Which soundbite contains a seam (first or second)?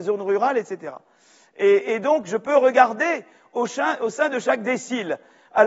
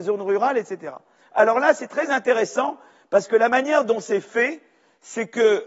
second